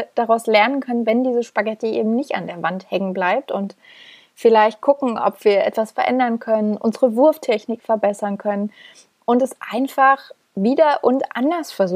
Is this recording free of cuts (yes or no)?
yes